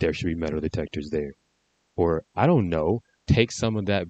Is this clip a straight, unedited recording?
yes; 0 cuts

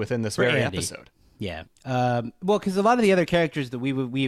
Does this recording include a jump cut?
yes; 1 cut; at 1.6 s

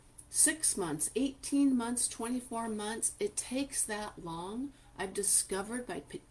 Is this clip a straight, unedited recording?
yes; 0 cuts

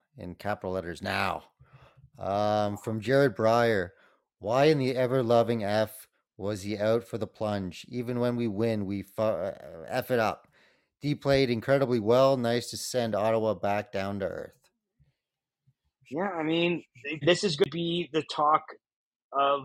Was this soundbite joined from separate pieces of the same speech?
yes; 1 cut; at 17.2 s

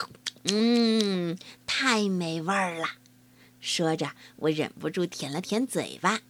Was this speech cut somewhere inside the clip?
no; 0 cuts

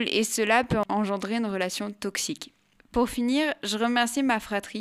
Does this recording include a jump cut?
yes; 1 cut; at 2.8 s

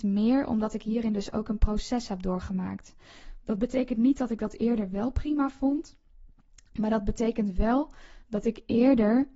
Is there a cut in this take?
no; 0 cuts

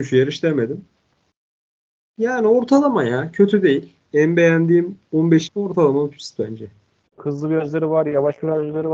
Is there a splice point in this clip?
yes; 3 cuts; at 4.1 s, 5.5 s, 7.1 s

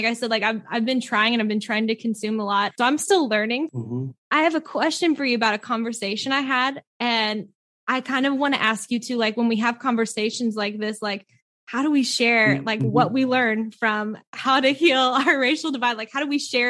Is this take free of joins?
yes; 0 cuts

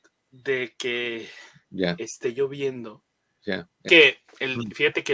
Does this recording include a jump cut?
yes; 1 cut; at 3.9 s

